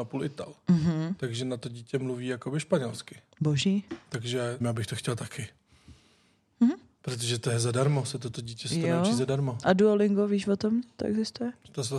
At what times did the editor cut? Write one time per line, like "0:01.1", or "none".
0:04.6